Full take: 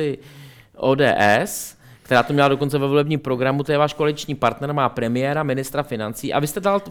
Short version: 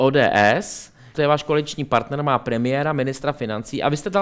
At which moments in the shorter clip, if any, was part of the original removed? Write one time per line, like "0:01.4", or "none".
0:01.1